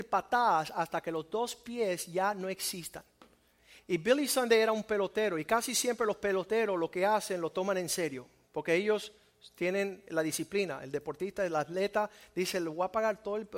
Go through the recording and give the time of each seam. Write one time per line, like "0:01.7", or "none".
0:03.8